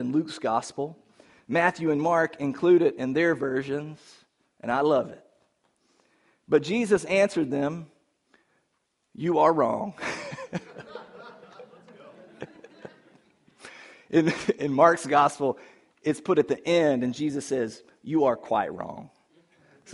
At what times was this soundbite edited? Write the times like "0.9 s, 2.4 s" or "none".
none